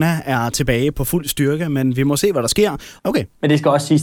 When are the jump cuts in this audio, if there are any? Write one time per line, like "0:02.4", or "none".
0:00.9
0:03.0